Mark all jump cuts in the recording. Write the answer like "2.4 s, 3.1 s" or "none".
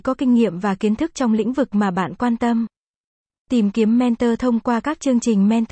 none